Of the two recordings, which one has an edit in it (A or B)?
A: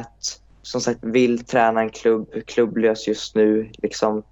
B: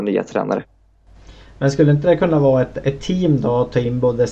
A